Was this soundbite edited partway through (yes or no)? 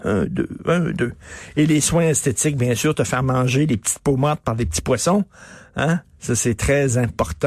no